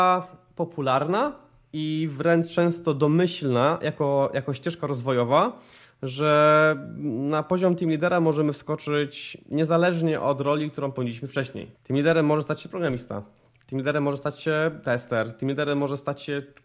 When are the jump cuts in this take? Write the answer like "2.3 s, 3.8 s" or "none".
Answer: 11.7 s